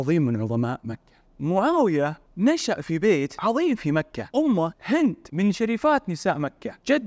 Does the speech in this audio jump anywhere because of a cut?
yes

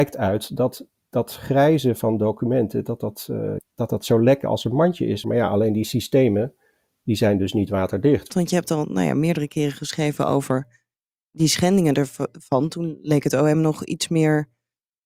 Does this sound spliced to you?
yes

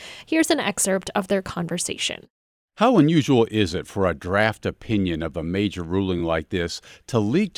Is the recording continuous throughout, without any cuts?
yes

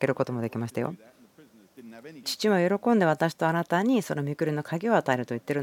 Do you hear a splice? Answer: yes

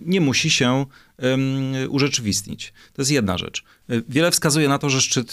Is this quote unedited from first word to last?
yes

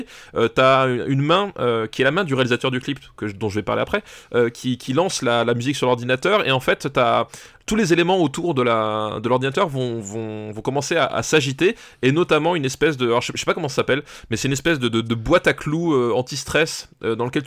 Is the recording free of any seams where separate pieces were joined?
yes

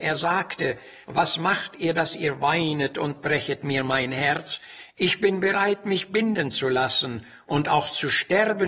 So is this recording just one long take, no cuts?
yes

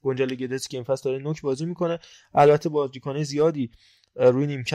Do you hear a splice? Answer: no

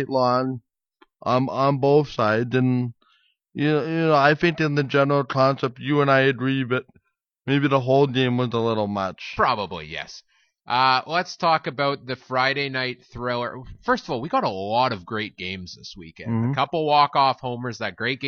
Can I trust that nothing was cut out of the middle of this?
yes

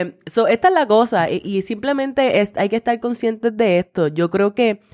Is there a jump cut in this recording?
no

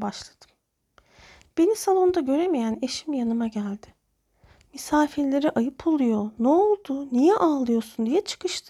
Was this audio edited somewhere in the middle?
no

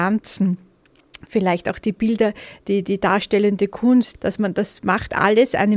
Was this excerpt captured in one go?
no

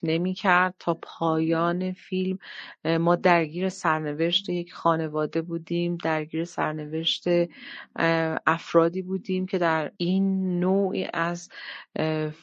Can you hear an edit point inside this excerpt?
yes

